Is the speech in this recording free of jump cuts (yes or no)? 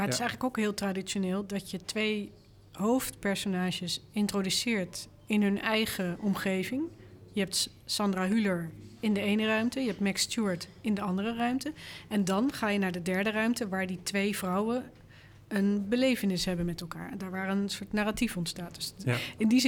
yes